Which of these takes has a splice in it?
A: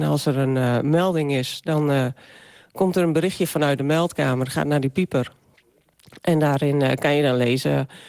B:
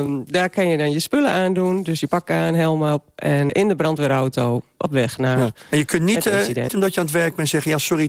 B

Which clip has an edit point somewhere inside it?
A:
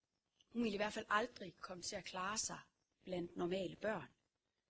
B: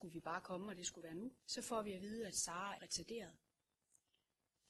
B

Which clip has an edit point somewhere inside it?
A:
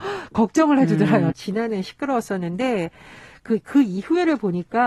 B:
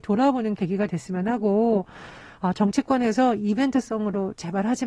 A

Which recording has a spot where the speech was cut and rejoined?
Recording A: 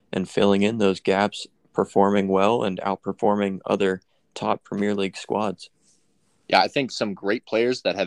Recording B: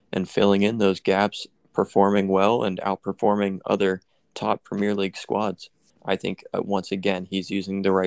B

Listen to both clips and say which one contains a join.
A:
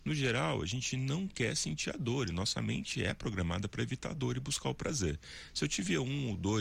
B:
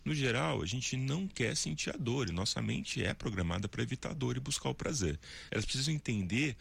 B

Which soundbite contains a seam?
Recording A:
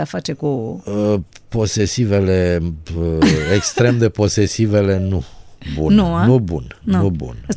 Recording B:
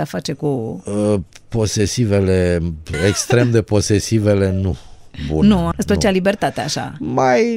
B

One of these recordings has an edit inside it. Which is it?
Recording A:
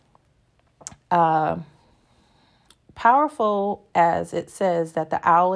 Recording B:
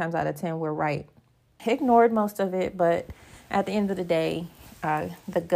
B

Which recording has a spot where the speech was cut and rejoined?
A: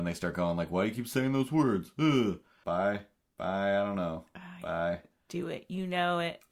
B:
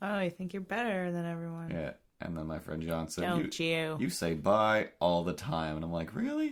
A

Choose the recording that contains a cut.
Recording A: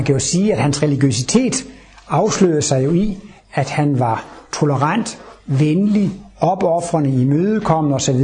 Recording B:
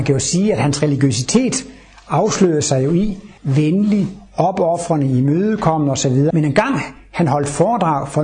B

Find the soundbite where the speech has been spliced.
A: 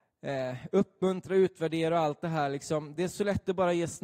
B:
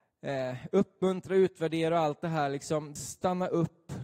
B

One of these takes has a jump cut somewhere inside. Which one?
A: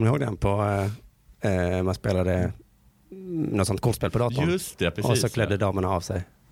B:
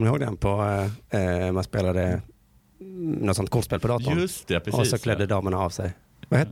B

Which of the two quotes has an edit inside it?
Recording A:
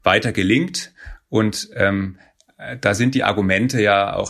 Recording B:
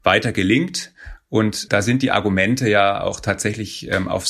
B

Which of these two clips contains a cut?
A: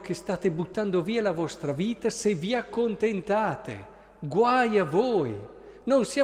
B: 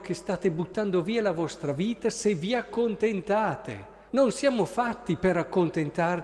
B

